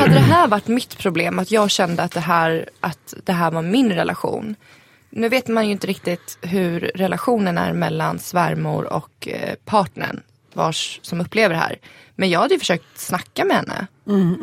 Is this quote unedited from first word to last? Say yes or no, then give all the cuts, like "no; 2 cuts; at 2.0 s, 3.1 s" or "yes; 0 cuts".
yes; 0 cuts